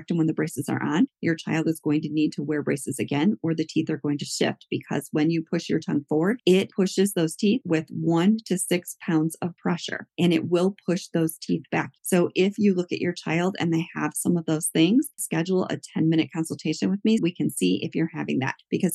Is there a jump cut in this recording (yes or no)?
yes